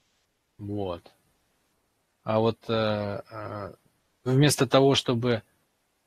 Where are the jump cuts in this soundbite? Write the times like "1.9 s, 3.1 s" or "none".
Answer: 2.1 s